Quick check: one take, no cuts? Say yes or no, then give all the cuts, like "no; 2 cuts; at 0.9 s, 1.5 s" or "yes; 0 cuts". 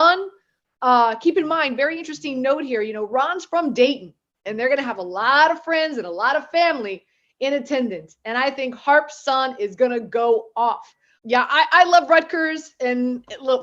no; 2 cuts; at 4.4 s, 11.2 s